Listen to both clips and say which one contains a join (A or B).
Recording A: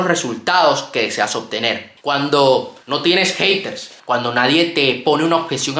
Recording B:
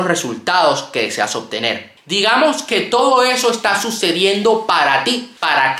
A